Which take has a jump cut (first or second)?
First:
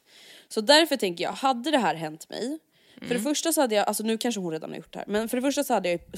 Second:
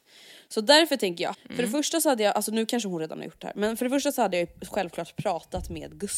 second